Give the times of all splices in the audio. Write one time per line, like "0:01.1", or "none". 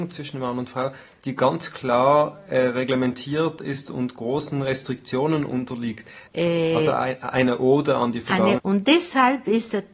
0:06.3
0:08.6